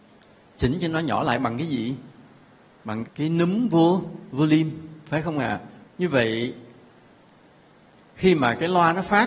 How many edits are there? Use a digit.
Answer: 2